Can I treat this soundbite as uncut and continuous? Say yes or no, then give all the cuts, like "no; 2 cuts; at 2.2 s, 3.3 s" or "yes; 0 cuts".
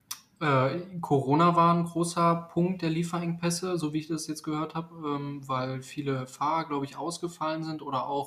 yes; 0 cuts